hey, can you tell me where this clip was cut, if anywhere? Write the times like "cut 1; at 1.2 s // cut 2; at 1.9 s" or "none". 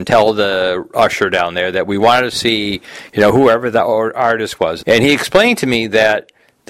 cut 1; at 4.8 s